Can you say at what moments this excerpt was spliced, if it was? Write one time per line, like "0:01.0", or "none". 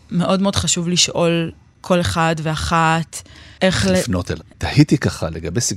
0:04.4

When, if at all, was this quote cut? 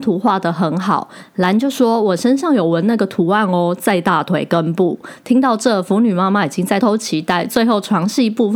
0:06.8

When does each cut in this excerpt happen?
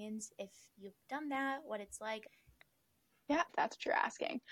0:02.3
0:03.5

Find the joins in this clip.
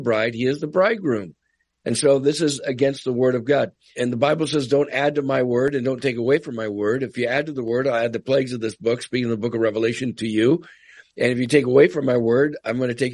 0:03.9

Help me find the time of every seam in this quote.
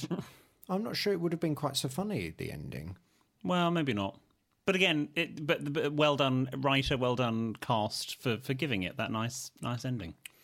none

